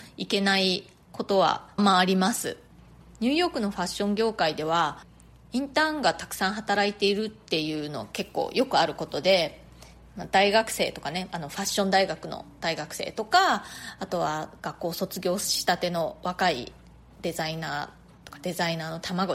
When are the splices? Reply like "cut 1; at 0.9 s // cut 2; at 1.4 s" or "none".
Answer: cut 1; at 1.8 s

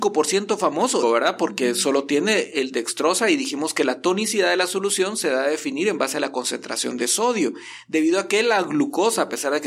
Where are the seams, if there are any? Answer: cut 1; at 1.0 s

